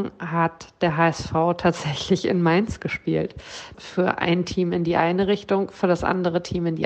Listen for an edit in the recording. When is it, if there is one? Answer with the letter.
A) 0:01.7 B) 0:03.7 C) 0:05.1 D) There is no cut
B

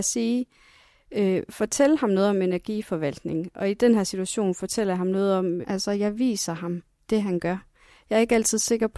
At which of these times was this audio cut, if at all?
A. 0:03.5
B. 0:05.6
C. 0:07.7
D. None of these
B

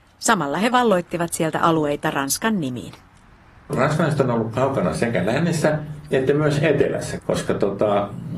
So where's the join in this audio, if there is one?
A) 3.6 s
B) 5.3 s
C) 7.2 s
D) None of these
C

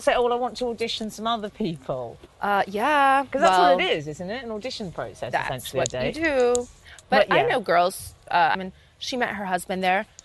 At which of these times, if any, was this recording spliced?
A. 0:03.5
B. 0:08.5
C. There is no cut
B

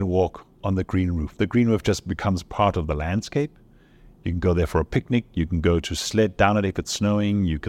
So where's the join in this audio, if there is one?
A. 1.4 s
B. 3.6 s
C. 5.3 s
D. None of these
D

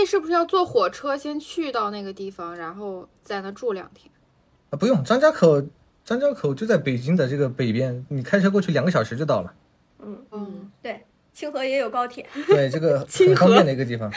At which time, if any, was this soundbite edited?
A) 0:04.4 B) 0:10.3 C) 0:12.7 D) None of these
B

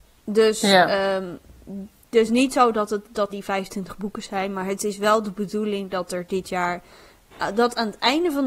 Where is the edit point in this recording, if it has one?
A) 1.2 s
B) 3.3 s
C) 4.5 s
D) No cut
B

